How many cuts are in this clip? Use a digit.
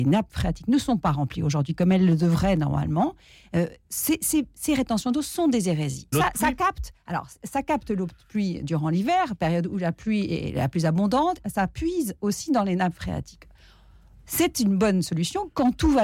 2